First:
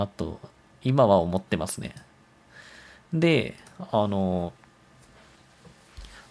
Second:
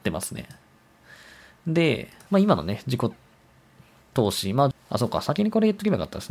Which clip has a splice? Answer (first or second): second